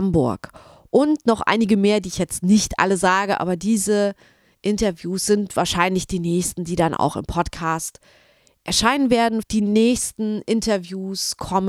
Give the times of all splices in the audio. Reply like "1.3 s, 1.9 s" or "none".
9.4 s